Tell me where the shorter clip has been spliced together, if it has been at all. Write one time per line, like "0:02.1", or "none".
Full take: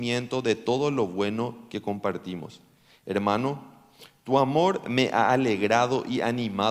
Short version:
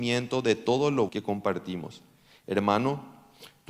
0:01.1